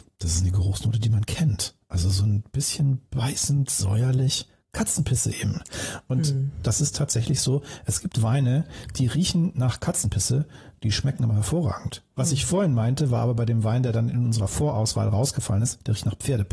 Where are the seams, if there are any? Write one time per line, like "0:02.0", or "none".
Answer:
none